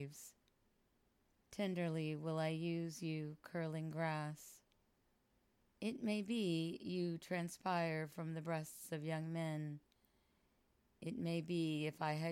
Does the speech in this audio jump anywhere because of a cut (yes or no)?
no